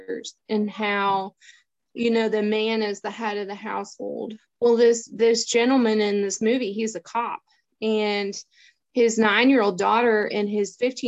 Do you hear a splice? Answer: no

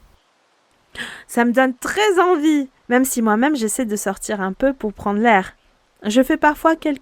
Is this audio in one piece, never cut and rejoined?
no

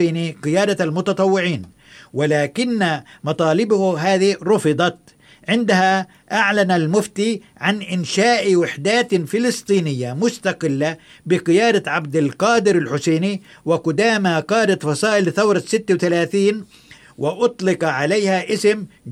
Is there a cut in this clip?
no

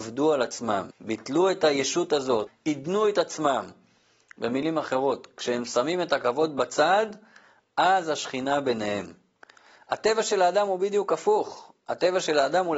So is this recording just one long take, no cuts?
no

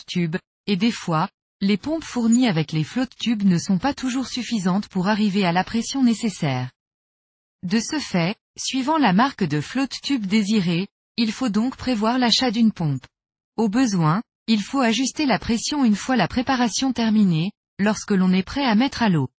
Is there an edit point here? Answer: yes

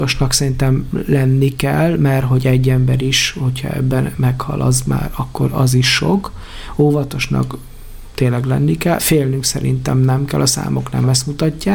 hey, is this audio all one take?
yes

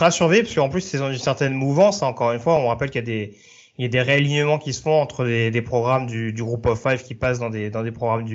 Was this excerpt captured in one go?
yes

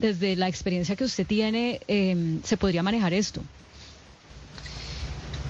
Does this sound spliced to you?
no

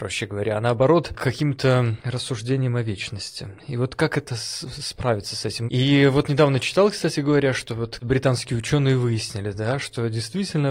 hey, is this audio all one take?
no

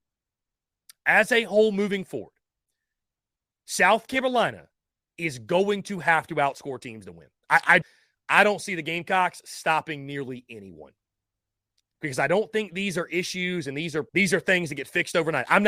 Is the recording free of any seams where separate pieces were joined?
no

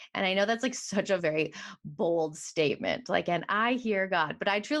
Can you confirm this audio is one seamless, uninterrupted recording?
yes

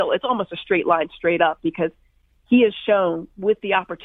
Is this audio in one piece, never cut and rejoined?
yes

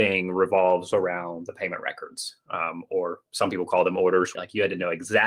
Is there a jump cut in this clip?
yes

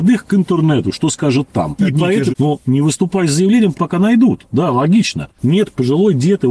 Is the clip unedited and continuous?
no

